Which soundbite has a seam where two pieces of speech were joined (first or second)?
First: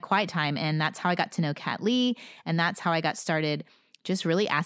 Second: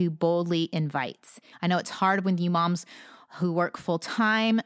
second